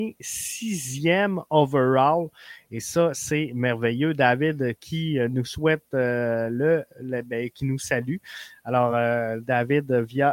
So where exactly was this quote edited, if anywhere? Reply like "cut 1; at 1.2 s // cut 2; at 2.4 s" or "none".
none